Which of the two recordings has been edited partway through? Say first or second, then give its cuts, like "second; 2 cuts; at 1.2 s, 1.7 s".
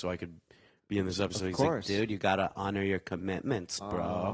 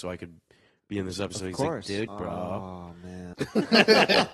second; 2 cuts; at 2.1 s, 3.3 s